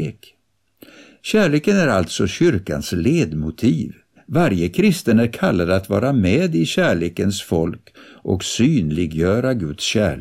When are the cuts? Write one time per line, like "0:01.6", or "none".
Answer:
0:04.2